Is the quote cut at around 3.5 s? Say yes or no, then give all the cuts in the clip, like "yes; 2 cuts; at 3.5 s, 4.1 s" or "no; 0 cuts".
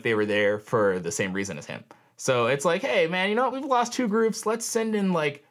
no; 0 cuts